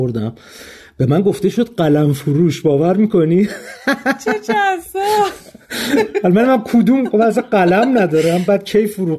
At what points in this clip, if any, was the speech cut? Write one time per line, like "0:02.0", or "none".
none